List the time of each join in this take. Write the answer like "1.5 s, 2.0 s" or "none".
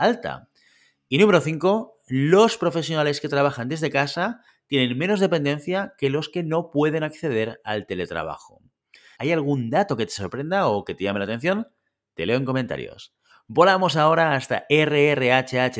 9.2 s

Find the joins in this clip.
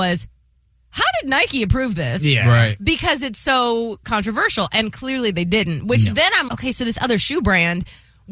6.5 s

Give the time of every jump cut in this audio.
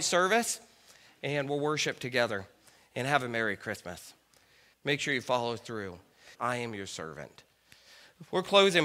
4.7 s, 6.3 s

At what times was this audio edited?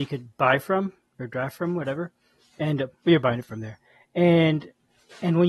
none

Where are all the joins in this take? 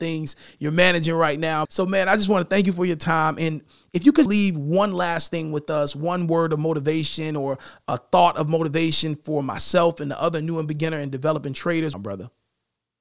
1.6 s, 4.3 s, 11.9 s

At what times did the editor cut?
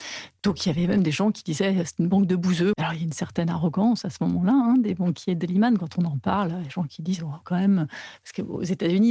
2.7 s

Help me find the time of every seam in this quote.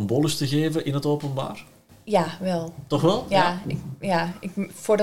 none

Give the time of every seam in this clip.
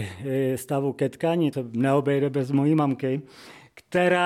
1.5 s

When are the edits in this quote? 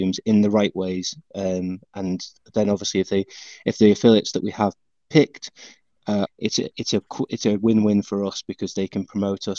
6.3 s

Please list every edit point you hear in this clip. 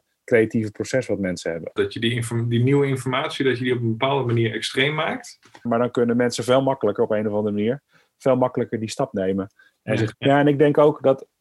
1.8 s, 5.7 s, 10.1 s

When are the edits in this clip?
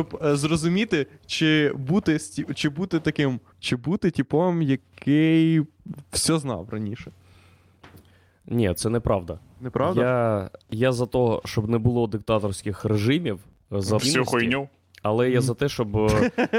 3.5 s, 14.0 s

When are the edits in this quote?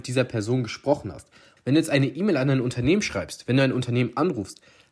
1.6 s

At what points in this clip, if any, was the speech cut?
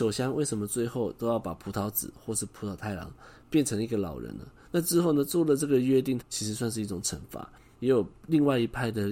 4.6 s, 6.2 s, 7.7 s

